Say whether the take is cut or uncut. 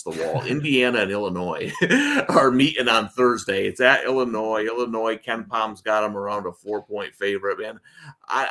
uncut